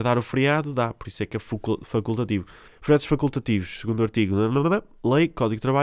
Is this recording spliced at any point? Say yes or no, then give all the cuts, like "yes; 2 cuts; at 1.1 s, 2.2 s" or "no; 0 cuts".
yes; 1 cut; at 2.7 s